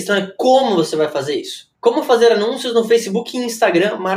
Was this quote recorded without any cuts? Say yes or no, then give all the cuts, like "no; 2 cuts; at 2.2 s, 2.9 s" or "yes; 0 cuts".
no; 1 cut; at 1.7 s